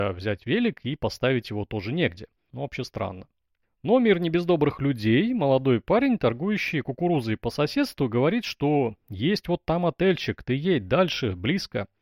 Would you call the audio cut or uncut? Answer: cut